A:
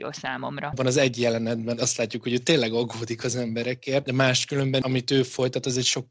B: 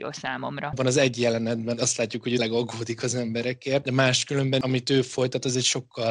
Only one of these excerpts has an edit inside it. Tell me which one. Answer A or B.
B